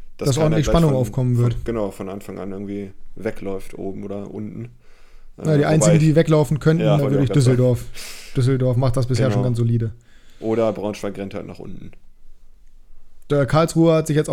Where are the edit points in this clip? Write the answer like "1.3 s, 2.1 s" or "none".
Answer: 7.0 s